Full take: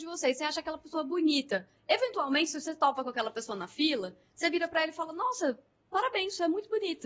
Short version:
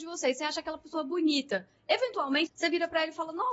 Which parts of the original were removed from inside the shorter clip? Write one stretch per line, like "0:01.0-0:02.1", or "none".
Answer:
0:02.5-0:04.3